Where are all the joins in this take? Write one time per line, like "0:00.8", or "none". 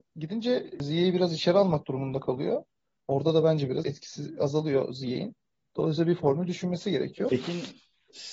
0:03.8
0:07.3